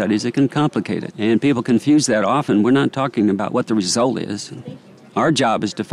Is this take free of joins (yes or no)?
no